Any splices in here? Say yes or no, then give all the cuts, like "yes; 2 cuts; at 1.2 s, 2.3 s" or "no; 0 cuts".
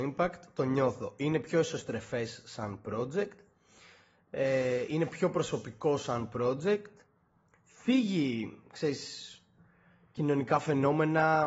no; 0 cuts